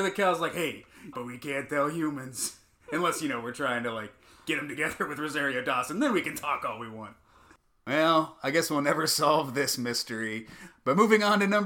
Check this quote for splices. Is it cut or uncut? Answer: cut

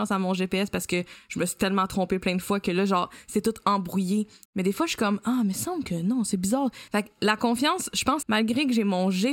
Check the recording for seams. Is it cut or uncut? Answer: cut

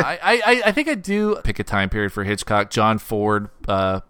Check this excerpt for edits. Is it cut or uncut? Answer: cut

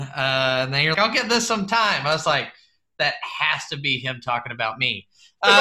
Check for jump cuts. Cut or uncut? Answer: cut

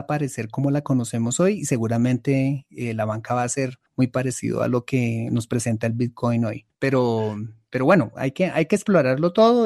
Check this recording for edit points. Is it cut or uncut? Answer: cut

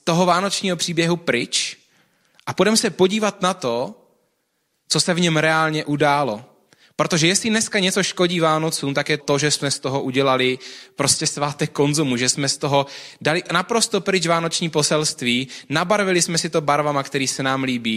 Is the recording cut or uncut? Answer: cut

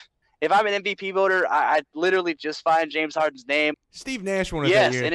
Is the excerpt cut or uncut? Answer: cut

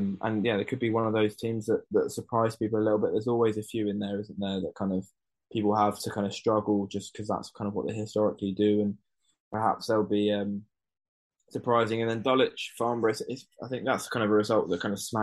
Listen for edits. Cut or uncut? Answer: uncut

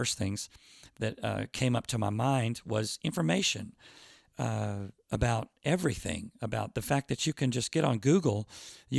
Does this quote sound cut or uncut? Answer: uncut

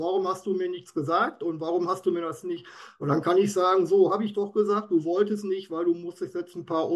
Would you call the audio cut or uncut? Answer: uncut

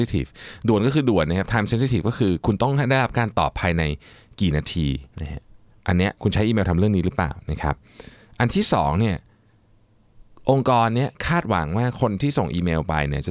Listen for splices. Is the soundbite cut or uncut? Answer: cut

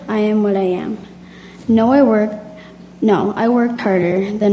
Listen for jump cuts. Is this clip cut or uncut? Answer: cut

